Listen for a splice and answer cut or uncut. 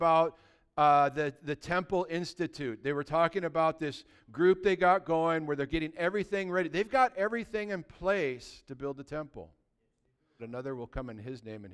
cut